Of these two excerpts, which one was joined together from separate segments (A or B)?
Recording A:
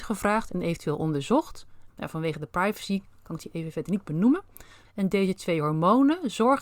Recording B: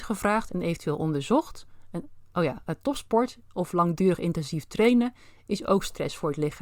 A